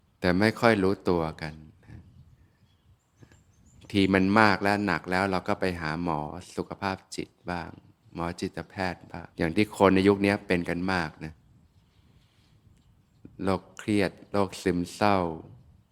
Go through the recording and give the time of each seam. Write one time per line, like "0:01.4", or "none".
0:09.3
0:13.3